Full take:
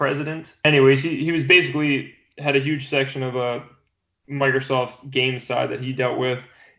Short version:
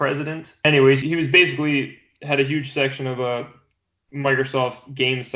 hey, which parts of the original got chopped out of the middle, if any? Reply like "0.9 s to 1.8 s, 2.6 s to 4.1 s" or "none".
1.0 s to 1.2 s